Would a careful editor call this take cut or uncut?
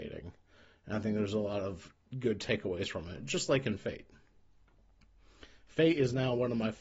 uncut